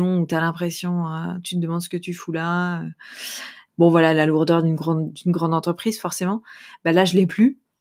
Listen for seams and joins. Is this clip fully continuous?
no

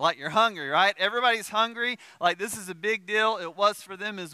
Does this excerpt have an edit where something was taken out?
no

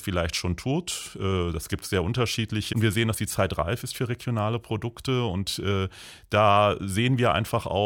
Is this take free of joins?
no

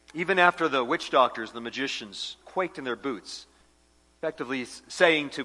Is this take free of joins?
yes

